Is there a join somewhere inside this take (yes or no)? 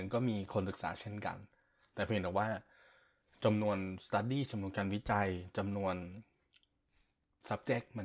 no